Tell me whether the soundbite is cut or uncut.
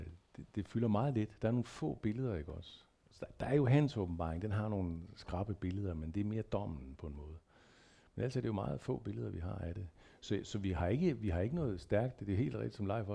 uncut